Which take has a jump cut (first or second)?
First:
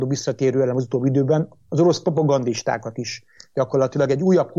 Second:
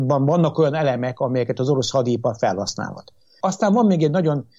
second